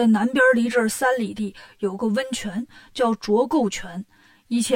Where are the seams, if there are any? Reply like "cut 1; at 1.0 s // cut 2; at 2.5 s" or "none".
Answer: none